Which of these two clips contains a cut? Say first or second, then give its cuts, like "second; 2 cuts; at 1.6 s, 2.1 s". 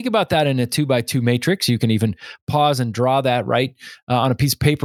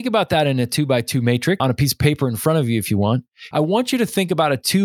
second; 2 cuts; at 1.6 s, 3.5 s